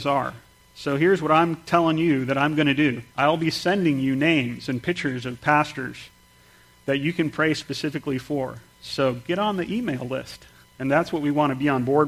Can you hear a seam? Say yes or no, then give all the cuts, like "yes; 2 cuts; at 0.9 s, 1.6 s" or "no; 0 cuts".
yes; 2 cuts; at 3.1 s, 10.6 s